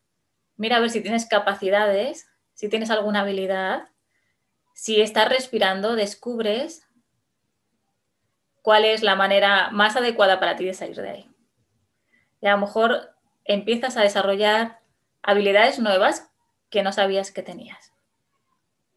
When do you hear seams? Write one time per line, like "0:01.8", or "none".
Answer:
none

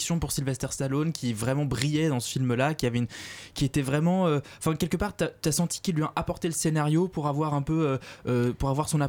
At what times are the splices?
none

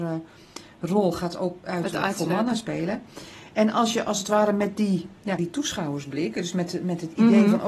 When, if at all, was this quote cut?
0:05.4

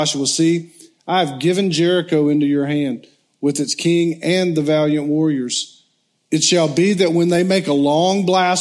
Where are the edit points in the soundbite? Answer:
0:06.2

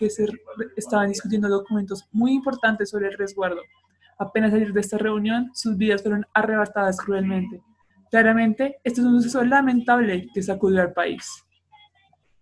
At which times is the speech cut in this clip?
none

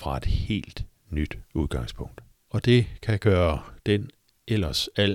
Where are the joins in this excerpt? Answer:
0:02.3

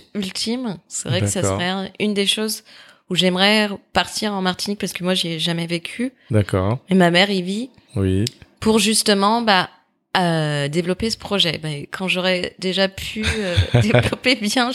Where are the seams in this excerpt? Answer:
none

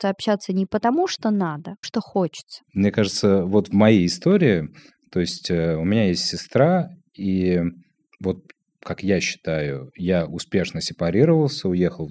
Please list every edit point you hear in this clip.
0:01.8

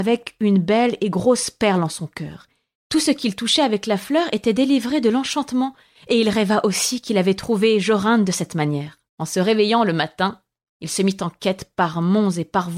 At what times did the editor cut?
0:02.7
0:09.1

